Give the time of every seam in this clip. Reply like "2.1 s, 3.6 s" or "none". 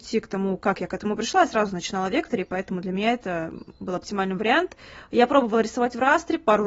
none